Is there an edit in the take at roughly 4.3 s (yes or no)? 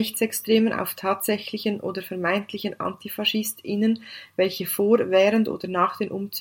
no